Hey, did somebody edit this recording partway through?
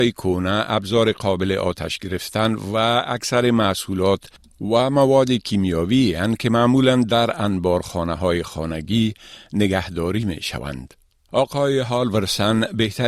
no; 0 cuts

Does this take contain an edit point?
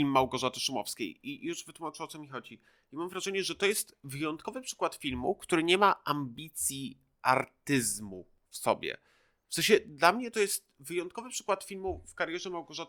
no; 0 cuts

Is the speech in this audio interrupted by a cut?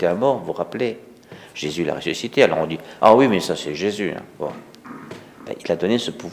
no; 0 cuts

